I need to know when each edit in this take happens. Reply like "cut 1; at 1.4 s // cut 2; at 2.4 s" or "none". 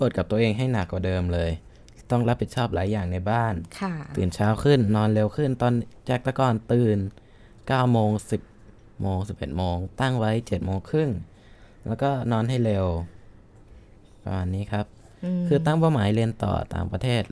none